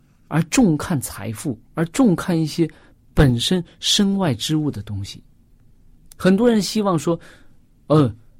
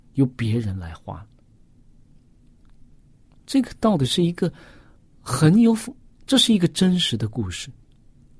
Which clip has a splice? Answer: first; 1 cut; at 1.6 s

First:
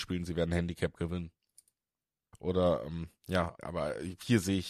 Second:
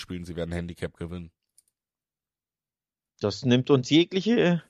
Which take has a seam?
first; 2 cuts; at 2.3 s, 3.6 s

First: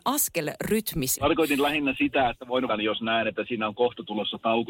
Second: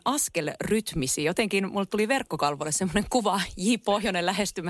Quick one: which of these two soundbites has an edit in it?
first; 2 cuts; at 1.2 s, 2.7 s

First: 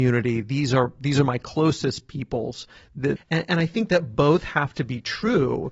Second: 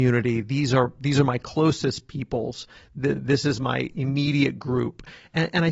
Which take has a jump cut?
first; 1 cut; at 3.2 s

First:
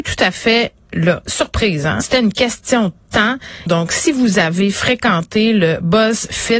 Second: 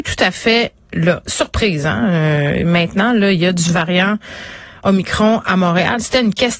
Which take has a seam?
first; 2 cuts; at 2.0 s, 3.7 s

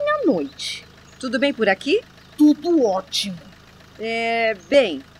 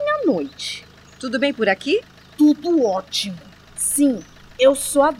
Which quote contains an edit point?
second; 1 cut; at 3.7 s

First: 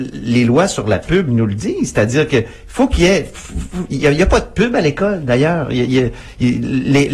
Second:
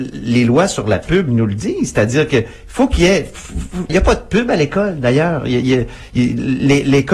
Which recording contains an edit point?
second; 1 cut; at 3.9 s

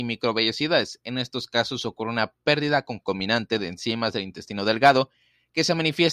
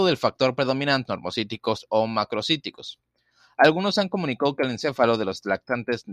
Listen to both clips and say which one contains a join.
second; 1 cut; at 1.1 s

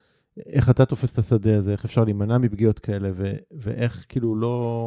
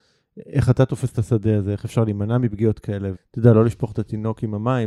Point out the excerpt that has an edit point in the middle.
second; 1 cut; at 3.2 s

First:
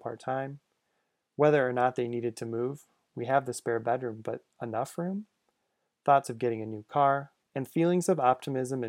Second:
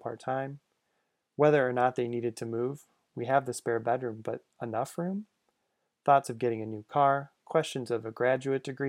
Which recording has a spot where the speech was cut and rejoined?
first; 1 cut; at 7.4 s

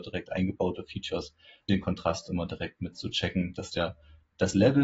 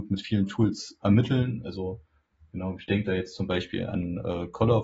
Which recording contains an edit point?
first; 1 cut; at 1.7 s

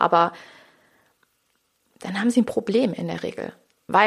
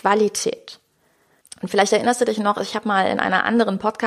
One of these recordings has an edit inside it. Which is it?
second; 1 cut; at 1.4 s

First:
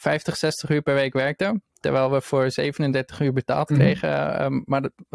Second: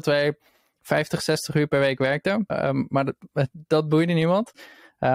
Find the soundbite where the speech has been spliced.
second; 1 cut; at 2.5 s

